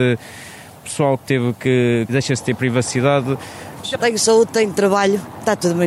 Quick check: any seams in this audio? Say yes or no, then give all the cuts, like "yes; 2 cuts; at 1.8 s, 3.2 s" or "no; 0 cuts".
yes; 2 cuts; at 2.1 s, 3.8 s